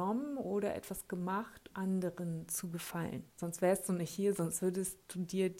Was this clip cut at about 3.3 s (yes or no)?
yes